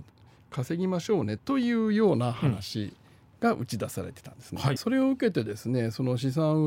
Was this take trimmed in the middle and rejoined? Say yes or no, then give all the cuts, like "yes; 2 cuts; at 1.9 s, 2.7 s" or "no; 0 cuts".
yes; 2 cuts; at 1.4 s, 4.8 s